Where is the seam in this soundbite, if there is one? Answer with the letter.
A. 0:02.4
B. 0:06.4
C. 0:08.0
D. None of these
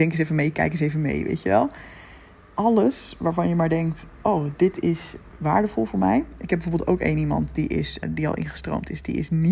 C